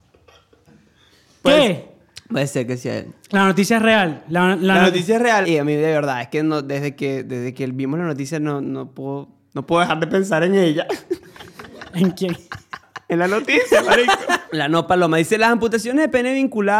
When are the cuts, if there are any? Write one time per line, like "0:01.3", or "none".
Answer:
0:05.4
0:14.5

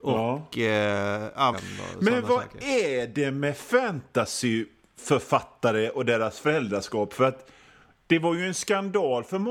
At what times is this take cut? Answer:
0:01.5

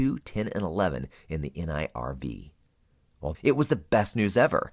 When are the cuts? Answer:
0:03.3

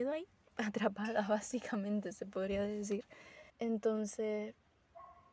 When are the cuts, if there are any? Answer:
0:03.5

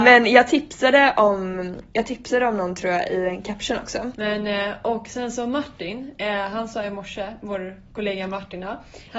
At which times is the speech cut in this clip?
0:04.1

